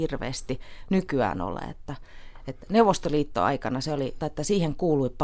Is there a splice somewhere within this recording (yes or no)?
yes